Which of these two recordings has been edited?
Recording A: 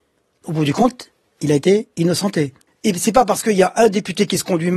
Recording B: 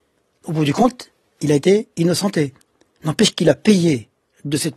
A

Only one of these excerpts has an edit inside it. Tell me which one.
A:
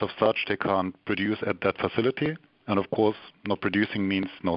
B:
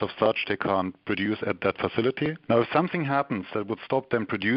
B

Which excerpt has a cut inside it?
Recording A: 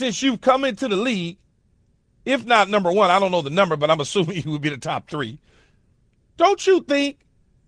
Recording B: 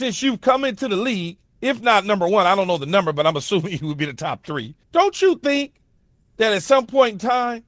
B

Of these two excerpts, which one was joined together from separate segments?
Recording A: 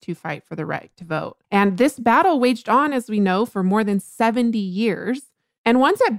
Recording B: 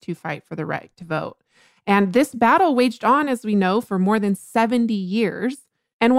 A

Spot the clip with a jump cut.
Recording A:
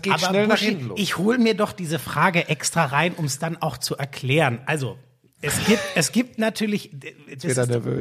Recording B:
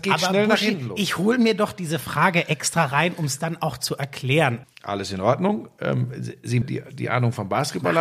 B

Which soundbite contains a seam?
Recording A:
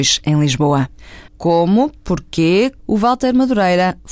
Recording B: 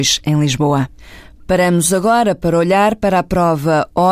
A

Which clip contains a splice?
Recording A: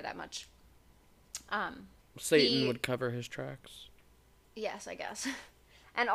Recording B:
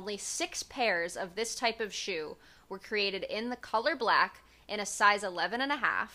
A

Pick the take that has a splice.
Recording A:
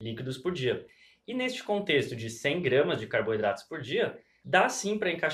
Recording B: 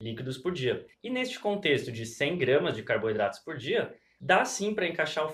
B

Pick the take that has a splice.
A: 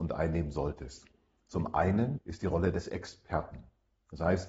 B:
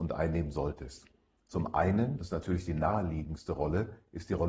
A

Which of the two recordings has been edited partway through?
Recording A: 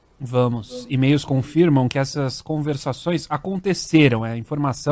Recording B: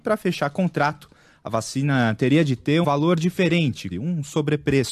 B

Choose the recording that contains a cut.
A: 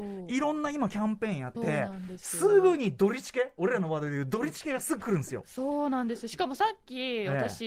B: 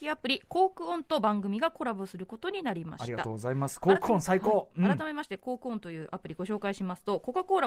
A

